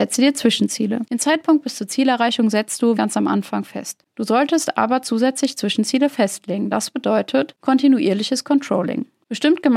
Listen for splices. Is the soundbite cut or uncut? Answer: cut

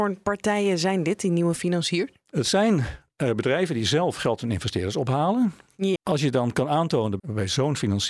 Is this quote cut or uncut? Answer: cut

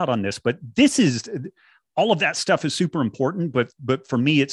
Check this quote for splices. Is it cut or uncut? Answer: uncut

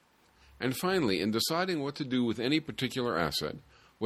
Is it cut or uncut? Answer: uncut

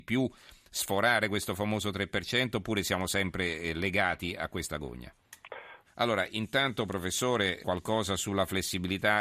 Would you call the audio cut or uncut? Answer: cut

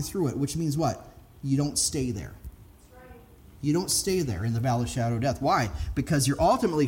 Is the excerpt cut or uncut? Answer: uncut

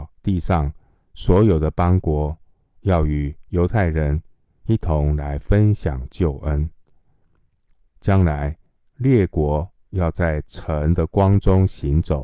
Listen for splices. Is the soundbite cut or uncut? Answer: cut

